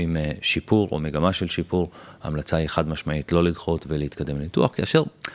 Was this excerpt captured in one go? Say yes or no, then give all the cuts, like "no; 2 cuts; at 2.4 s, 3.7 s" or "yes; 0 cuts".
yes; 0 cuts